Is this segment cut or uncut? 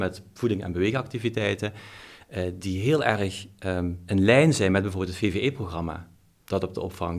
uncut